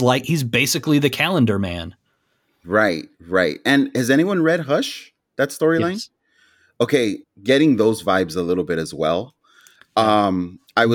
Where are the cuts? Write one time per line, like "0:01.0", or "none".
0:07.2